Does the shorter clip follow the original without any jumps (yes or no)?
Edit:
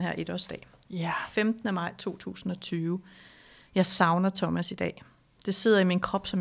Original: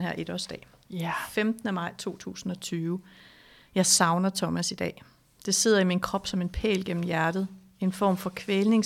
yes